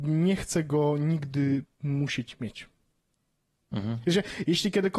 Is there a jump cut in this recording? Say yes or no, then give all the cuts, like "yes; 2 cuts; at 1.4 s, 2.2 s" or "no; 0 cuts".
no; 0 cuts